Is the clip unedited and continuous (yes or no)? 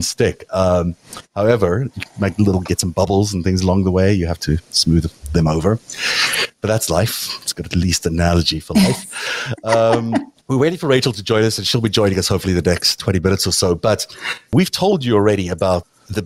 no